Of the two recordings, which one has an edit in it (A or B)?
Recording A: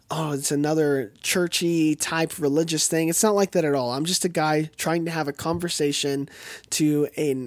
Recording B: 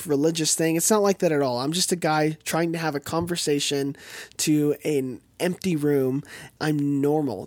B